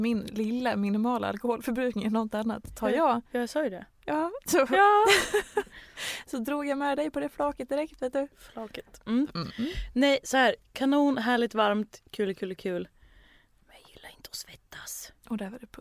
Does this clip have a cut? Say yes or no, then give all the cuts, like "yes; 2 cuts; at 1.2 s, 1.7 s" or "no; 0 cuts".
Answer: no; 0 cuts